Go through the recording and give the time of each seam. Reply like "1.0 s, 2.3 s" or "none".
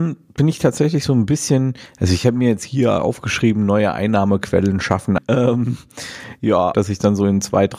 5.2 s, 6.7 s

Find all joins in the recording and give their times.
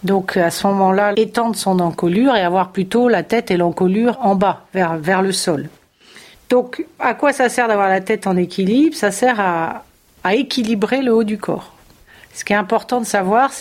1.1 s, 6.3 s

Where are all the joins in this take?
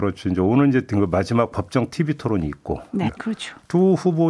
3.1 s

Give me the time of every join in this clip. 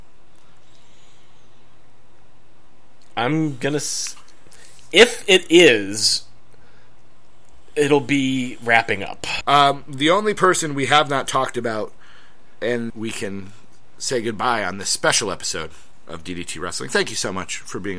9.4 s, 12.9 s

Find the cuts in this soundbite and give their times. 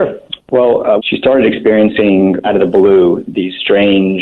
1.0 s, 2.4 s

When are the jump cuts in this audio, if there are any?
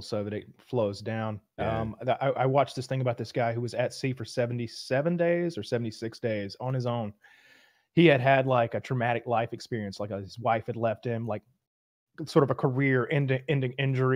none

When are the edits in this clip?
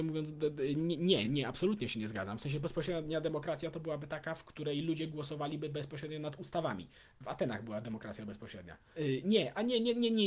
1.2 s, 8.9 s

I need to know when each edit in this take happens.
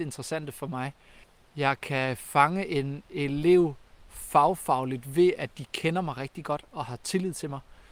none

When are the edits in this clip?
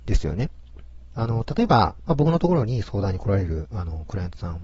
1.1 s

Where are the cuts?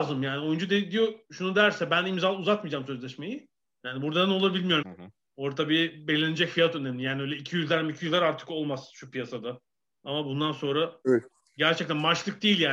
3.6 s, 4.8 s

